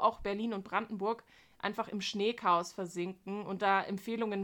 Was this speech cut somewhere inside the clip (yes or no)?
no